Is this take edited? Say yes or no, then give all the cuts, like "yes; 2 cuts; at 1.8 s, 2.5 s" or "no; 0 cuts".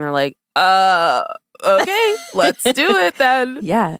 no; 0 cuts